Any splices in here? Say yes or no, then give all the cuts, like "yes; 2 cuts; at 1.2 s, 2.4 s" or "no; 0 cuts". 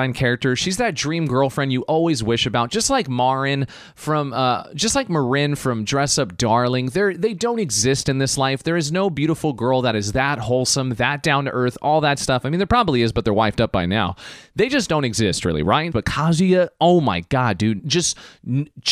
yes; 2 cuts; at 15.9 s, 17.8 s